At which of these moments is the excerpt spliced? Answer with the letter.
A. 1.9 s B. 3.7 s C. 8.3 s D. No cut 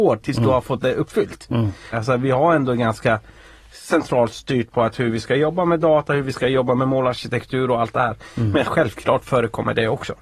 A